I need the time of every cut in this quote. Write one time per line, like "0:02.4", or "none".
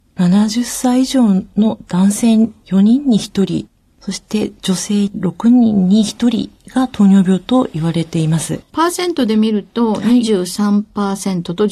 none